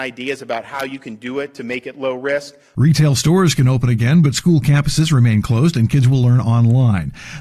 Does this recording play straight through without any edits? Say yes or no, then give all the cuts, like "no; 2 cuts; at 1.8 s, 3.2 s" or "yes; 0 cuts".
no; 1 cut; at 2.7 s